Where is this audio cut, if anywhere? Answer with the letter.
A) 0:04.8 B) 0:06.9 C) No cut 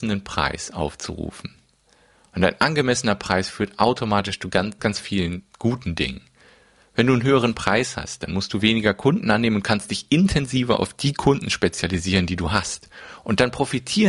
A